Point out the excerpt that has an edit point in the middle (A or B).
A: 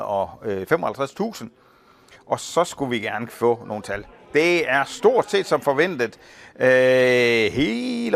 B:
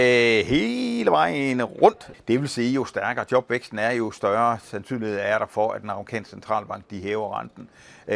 B